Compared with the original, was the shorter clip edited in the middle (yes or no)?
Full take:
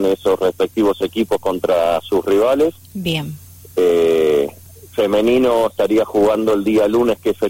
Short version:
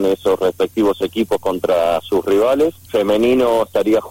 yes